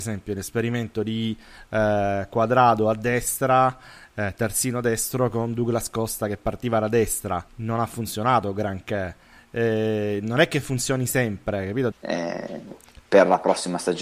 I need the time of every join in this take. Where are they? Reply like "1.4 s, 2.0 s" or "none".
7.5 s, 11.9 s